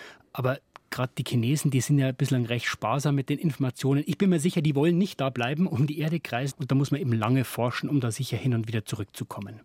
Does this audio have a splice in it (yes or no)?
yes